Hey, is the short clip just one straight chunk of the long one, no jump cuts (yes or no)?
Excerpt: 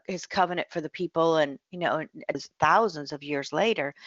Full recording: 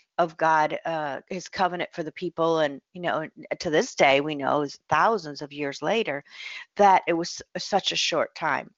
no